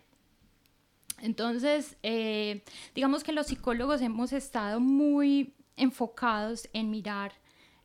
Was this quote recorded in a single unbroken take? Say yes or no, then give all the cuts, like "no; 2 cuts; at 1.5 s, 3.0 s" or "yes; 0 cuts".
yes; 0 cuts